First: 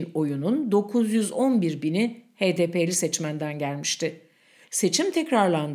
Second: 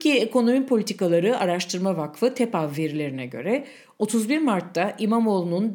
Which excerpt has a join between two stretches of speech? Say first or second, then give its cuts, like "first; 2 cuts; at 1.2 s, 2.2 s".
first; 1 cut; at 4.6 s